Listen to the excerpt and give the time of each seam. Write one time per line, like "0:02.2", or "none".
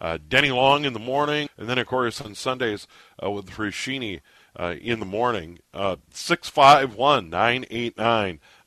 0:01.5